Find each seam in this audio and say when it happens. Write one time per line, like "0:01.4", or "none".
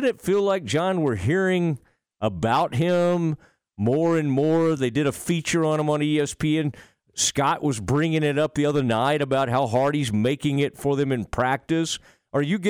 none